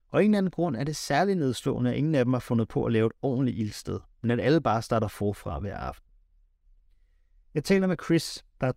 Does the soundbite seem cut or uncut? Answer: uncut